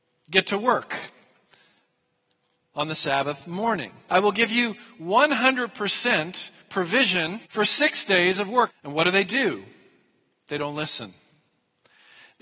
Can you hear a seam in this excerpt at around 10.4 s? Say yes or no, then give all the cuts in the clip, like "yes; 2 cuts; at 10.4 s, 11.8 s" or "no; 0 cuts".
no; 3 cuts; at 4.1 s, 7.4 s, 8.7 s